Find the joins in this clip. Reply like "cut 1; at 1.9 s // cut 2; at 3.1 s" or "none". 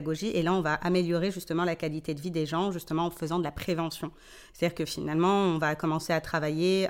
none